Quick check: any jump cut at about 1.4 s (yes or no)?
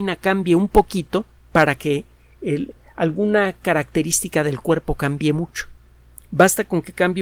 yes